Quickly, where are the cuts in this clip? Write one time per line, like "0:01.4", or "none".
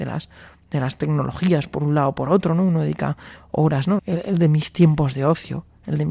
0:04.0